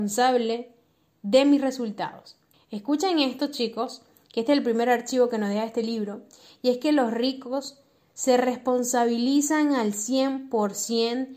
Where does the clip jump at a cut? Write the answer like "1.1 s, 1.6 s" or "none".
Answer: 2.5 s